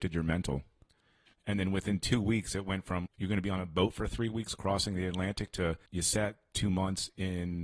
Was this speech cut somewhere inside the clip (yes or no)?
yes